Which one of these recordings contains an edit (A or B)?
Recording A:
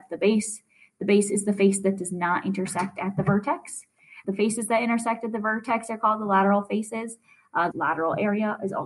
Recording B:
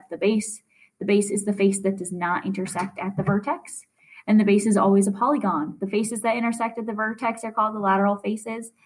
A